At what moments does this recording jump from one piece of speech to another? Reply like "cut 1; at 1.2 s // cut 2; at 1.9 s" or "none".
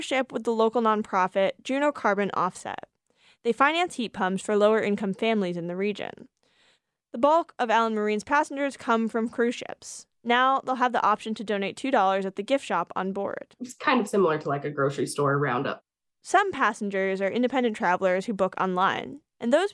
none